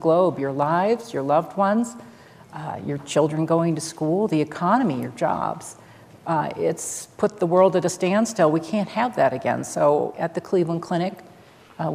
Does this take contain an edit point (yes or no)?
yes